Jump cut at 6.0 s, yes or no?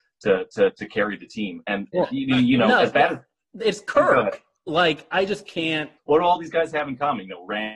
yes